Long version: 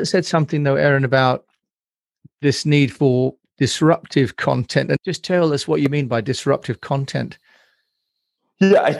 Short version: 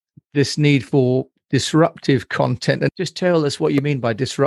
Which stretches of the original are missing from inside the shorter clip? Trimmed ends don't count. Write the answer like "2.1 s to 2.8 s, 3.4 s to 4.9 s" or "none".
none